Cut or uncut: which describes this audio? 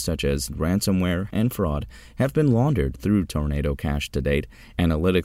cut